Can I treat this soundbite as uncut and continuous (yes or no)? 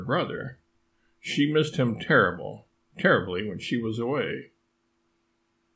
yes